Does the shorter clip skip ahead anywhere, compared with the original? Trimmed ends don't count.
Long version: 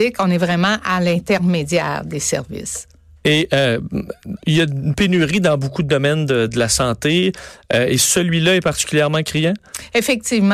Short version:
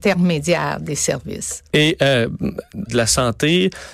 yes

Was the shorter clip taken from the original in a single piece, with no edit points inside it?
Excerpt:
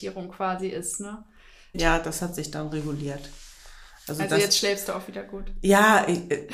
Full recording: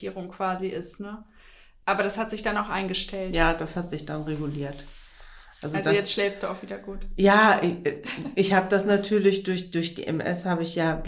no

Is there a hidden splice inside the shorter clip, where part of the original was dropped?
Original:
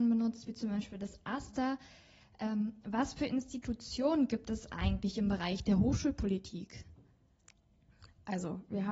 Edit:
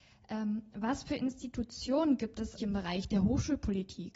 yes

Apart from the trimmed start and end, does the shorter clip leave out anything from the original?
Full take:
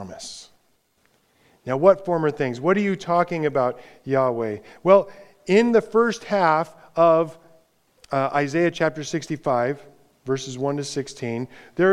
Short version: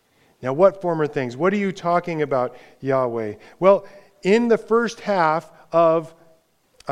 no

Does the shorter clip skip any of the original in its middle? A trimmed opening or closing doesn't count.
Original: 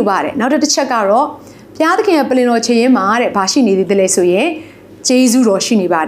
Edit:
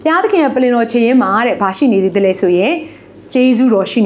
no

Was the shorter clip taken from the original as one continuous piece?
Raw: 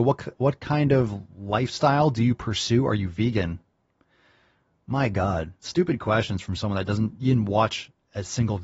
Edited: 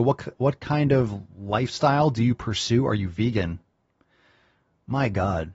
yes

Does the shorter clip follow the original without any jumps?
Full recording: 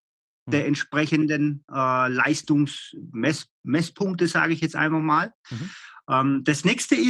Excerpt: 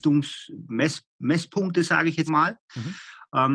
no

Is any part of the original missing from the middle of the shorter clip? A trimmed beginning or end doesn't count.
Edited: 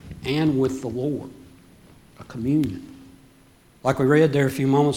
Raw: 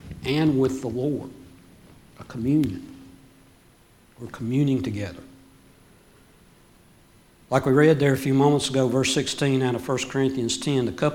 yes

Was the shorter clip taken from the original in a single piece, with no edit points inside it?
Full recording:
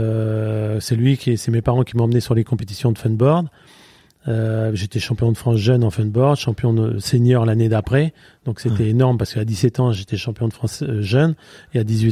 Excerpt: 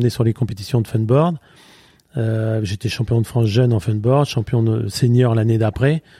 yes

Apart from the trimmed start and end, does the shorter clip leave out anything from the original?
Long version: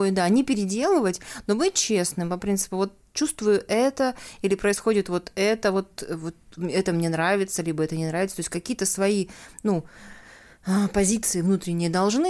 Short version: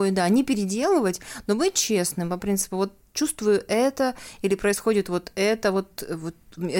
no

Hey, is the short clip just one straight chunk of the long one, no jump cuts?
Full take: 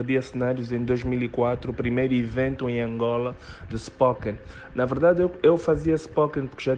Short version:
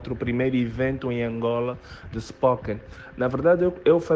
yes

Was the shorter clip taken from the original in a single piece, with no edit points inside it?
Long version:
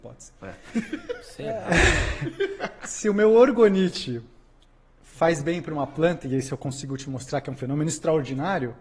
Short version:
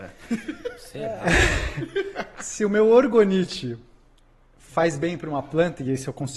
yes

